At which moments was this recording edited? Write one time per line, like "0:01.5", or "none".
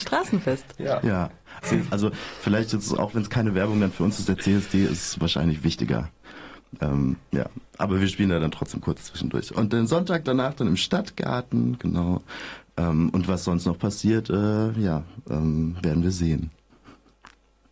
0:01.6